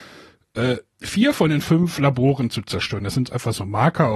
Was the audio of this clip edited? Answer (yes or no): no